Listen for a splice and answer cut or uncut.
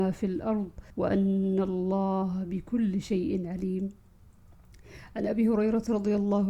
cut